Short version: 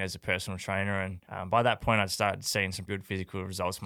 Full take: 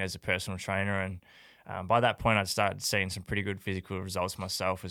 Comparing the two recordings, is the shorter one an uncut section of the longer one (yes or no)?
no